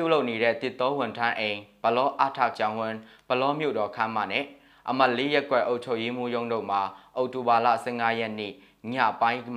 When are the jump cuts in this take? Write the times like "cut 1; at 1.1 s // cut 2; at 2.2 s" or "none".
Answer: cut 1; at 2.5 s